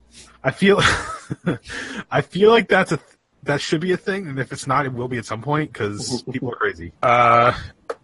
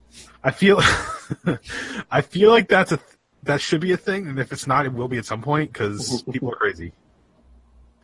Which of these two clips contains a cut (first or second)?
first